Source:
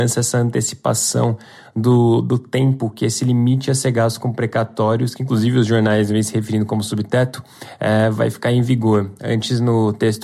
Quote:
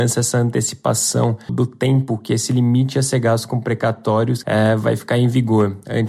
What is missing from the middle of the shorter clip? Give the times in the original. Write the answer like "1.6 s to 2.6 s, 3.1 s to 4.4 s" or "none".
1.5 s to 2.2 s, 5.2 s to 7.8 s